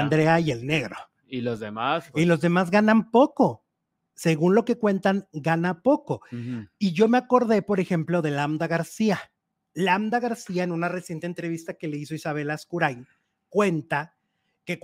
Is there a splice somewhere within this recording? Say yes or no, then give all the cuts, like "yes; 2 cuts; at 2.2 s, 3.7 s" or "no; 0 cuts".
no; 0 cuts